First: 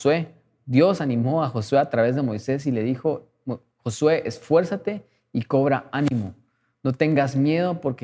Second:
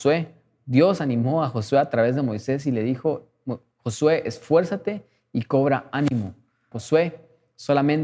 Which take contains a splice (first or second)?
second